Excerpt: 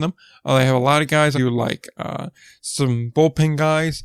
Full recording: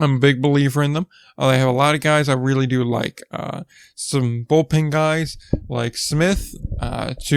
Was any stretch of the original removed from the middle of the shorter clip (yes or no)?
yes